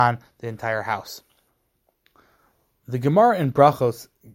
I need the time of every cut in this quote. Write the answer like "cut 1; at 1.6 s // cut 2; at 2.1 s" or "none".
none